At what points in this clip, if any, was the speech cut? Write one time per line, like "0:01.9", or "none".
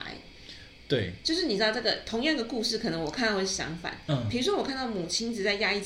0:01.2